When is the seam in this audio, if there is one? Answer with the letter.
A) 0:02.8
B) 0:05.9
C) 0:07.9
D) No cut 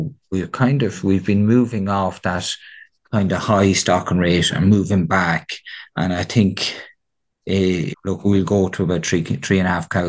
C